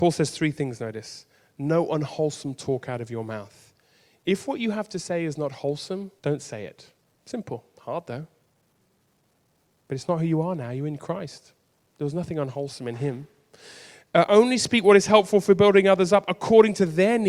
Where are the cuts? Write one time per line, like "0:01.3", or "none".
0:06.2